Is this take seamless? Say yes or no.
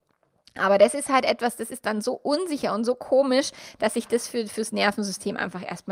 yes